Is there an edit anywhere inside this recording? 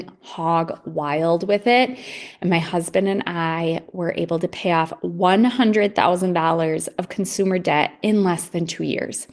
no; 0 cuts

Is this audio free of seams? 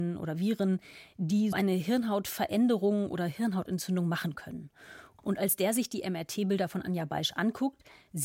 no; 2 cuts; at 1.5 s, 5.2 s

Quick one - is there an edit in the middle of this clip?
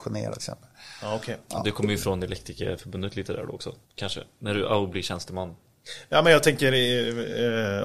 yes; 1 cut; at 3.8 s

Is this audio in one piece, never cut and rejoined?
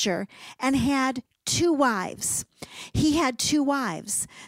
no; 1 cut; at 2.9 s

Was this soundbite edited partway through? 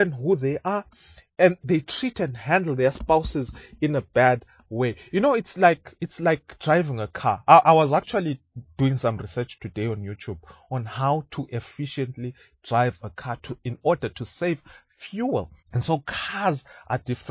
yes; 2 cuts; at 1.6 s, 15.6 s

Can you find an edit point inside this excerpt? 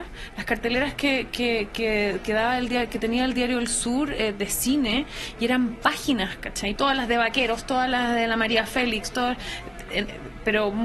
yes; 1 cut; at 6.8 s

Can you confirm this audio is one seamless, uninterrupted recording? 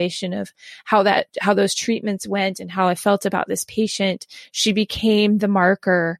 yes; 0 cuts

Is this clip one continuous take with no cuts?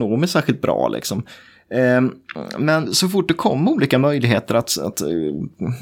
no; 1 cut; at 2.8 s

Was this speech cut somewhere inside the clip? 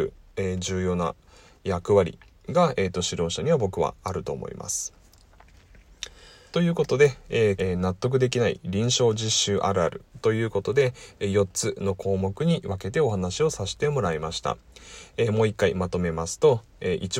yes; 2 cuts; at 6.5 s, 7.6 s

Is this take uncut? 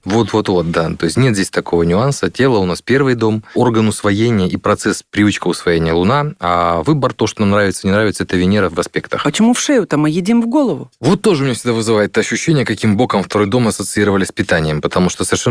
yes; 0 cuts

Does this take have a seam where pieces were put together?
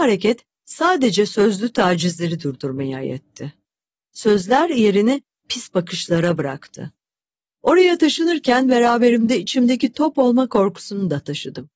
yes; 1 cut; at 7.4 s

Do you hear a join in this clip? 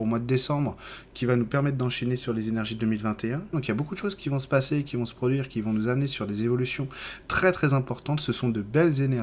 yes; 1 cut; at 3.5 s

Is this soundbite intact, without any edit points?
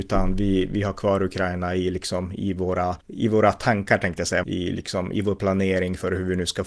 no; 2 cuts; at 3.0 s, 4.4 s

